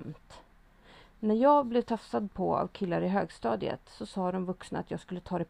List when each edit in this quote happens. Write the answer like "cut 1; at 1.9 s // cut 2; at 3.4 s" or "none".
none